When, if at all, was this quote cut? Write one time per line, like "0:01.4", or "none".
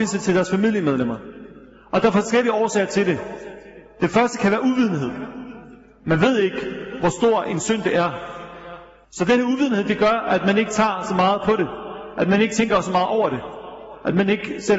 0:07.5
0:09.0